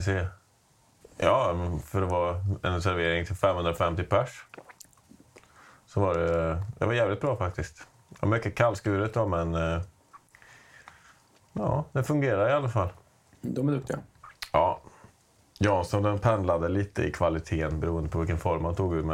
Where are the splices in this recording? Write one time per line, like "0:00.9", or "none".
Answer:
0:01.0